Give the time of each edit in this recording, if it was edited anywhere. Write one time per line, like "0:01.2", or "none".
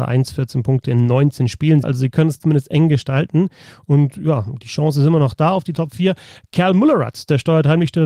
0:01.8